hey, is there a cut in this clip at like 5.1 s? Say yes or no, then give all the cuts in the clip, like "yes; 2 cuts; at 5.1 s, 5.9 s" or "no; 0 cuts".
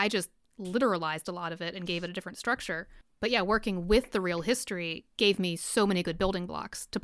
yes; 1 cut; at 5.1 s